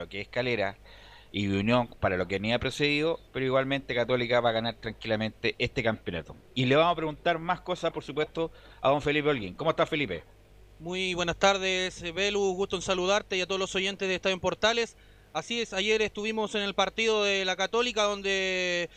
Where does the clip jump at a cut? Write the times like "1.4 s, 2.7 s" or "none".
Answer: 3.3 s, 7.9 s